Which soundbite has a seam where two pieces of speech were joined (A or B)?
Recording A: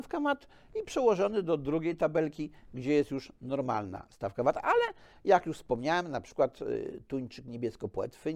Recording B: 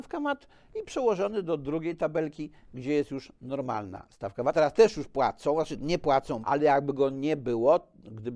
B